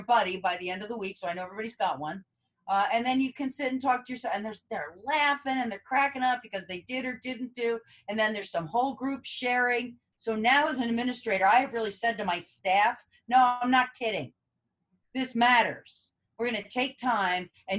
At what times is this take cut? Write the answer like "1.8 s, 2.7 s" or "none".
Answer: none